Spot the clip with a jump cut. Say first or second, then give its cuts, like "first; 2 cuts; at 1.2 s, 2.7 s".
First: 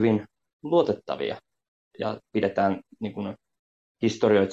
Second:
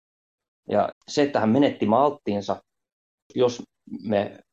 second; 1 cut; at 0.9 s